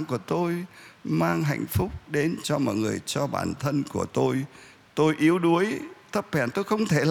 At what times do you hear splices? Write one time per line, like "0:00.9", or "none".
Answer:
none